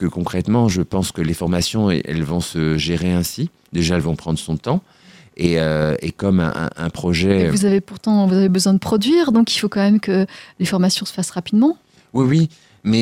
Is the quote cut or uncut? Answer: uncut